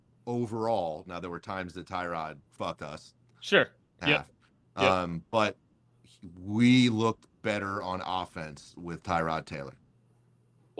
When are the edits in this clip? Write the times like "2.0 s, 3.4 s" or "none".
2.5 s, 4.0 s